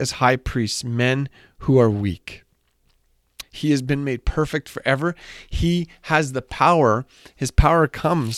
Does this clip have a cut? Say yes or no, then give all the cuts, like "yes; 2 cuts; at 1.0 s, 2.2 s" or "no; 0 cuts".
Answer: yes; 1 cut; at 3.4 s